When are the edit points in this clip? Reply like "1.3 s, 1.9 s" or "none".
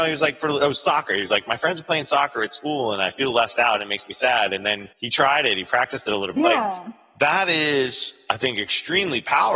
4.9 s, 6.4 s